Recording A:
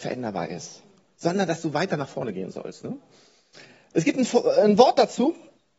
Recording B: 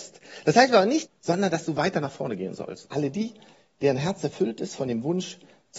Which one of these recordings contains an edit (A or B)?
B